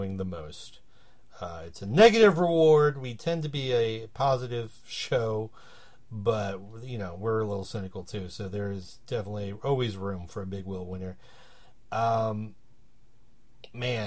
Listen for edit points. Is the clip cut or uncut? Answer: uncut